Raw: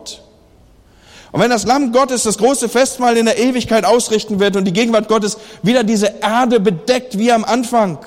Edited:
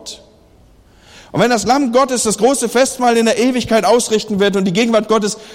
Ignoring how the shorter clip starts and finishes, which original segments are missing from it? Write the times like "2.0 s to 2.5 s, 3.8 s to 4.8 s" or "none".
none